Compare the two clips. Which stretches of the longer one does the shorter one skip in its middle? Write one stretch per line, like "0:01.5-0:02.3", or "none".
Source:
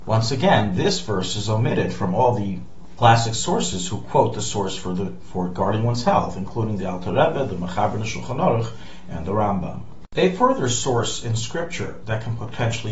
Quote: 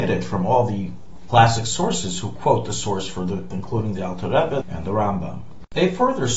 0:05.2-0:06.3
0:07.4-0:09.0